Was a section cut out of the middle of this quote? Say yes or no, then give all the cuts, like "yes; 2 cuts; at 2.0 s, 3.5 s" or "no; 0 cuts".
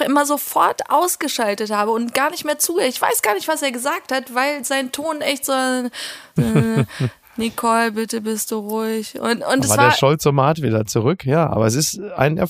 yes; 1 cut; at 6.4 s